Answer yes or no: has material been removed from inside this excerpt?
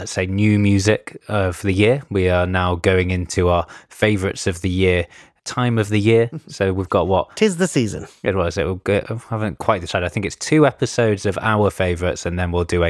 no